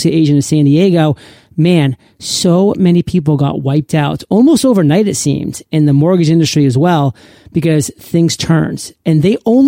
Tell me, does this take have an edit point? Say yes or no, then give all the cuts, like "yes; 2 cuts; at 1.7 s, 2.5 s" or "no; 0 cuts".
no; 0 cuts